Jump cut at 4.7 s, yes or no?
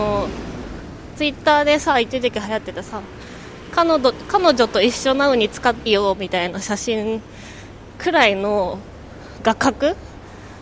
no